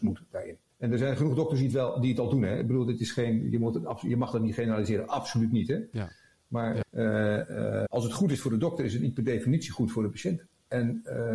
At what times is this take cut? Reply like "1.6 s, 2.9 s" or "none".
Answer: 6.8 s, 7.9 s

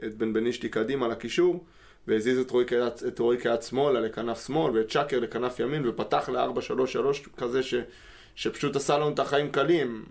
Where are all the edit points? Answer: none

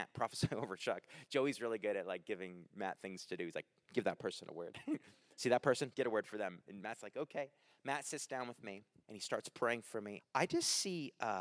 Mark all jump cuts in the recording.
5.9 s, 9.0 s, 10.2 s

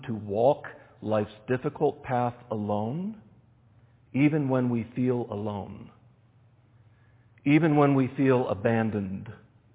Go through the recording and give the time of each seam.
none

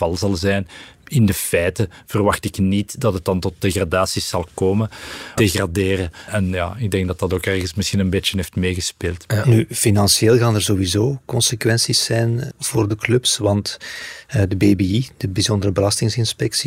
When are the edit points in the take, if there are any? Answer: 5.4 s, 12.5 s

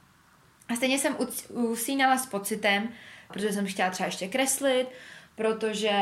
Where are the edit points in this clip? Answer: 3.3 s

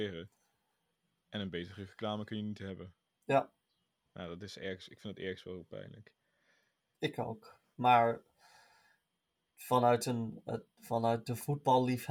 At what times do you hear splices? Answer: none

